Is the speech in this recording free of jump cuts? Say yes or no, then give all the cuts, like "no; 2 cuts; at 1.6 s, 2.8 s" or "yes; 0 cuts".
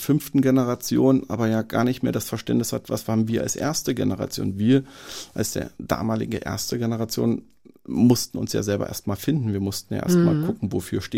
yes; 0 cuts